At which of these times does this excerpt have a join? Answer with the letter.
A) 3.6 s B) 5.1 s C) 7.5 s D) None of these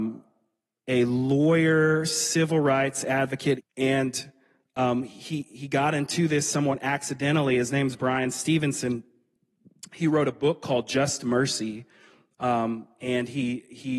A